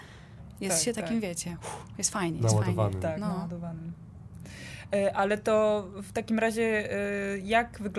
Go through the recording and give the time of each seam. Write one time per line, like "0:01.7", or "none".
none